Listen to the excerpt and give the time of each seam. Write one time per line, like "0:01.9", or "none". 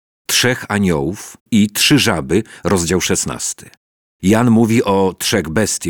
0:01.5